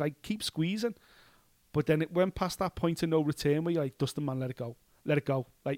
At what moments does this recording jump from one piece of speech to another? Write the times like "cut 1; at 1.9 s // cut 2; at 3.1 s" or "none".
none